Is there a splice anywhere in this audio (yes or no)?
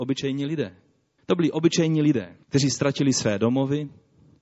yes